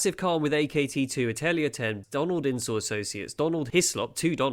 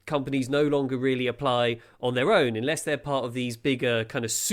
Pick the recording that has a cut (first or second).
first